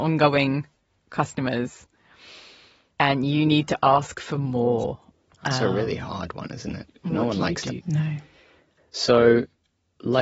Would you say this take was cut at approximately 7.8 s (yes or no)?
yes